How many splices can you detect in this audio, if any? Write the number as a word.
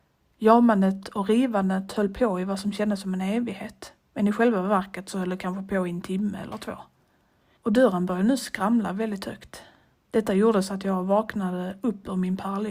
two